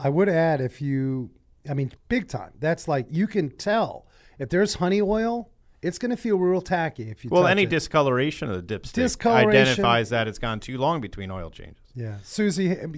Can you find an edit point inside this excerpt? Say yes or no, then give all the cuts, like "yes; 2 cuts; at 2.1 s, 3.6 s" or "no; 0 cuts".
yes; 1 cut; at 2.0 s